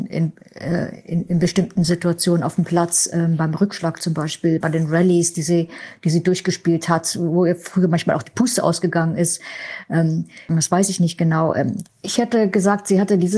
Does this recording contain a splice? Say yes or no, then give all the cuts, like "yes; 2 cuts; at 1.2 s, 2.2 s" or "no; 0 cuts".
yes; 3 cuts; at 4.6 s, 10.5 s, 11.9 s